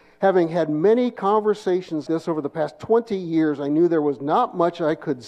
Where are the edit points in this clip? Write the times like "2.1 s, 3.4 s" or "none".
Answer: 2.1 s

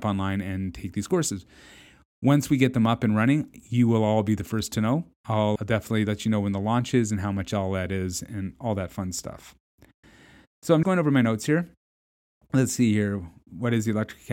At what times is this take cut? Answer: 5.6 s, 10.8 s

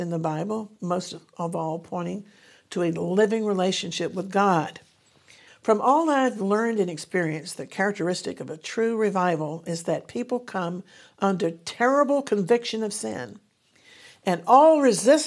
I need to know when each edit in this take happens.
5.5 s

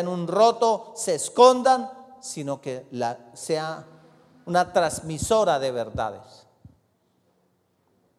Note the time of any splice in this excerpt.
none

